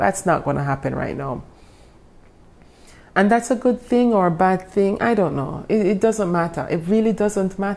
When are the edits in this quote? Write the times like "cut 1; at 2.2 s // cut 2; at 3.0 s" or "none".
none